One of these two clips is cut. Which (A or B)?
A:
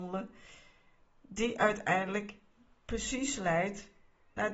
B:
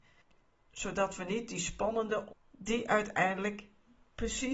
B